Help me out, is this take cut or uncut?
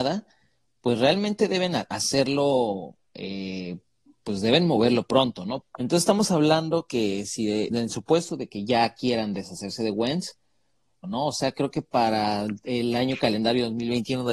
cut